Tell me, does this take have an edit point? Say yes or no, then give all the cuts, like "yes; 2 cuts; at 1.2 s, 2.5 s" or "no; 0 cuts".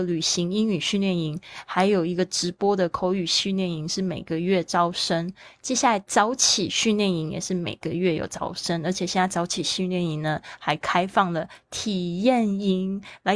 no; 0 cuts